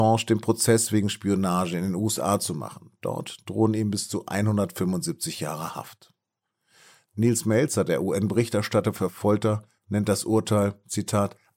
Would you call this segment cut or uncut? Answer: uncut